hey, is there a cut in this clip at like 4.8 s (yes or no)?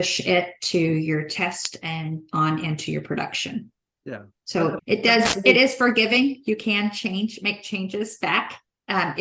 yes